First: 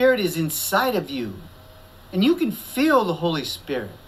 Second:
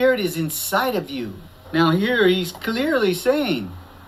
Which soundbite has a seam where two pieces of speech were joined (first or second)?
second